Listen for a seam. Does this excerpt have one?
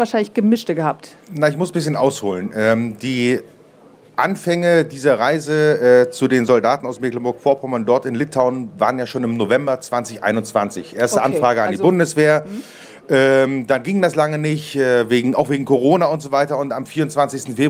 no; 0 cuts

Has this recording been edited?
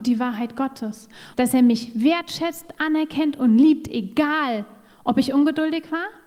yes; 1 cut; at 1.3 s

